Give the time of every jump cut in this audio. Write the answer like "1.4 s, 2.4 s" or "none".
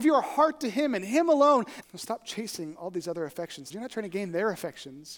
1.8 s, 3.7 s